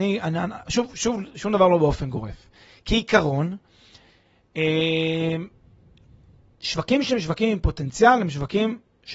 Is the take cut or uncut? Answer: uncut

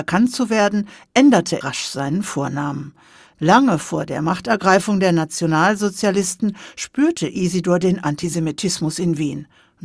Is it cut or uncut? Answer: cut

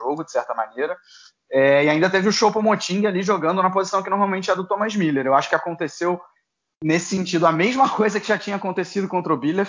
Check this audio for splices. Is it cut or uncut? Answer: uncut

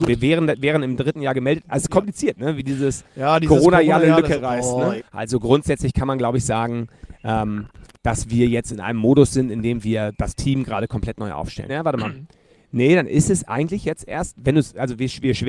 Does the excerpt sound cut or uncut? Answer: cut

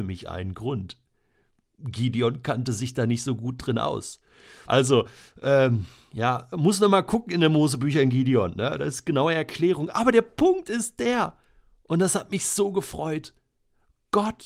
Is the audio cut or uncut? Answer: cut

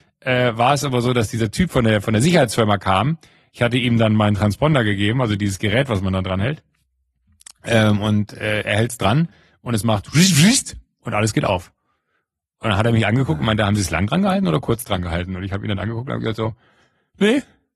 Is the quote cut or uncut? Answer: uncut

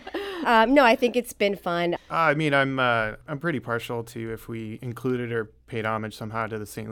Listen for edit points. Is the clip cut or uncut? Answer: cut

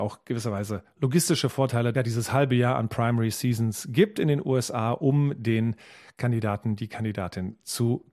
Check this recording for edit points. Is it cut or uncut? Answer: cut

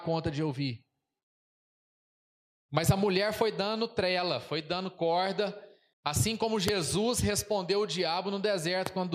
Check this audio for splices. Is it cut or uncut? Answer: cut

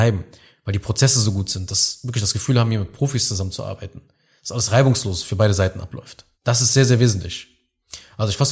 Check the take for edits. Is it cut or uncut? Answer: cut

